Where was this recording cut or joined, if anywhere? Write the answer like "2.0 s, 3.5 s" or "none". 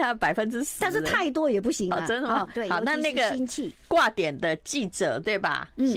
2.5 s

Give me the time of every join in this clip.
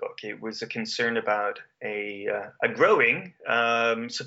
none

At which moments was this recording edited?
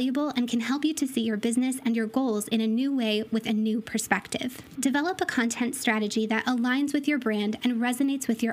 4.8 s

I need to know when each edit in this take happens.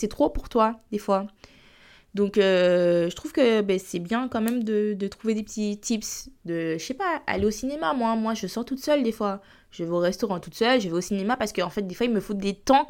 none

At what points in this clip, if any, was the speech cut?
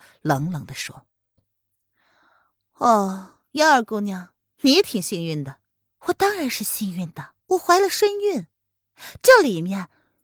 5.9 s, 7.4 s

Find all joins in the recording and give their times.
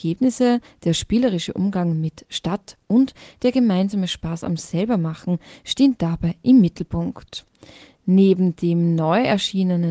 none

